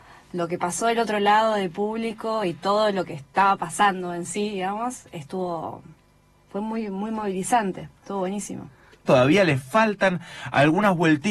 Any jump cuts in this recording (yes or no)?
yes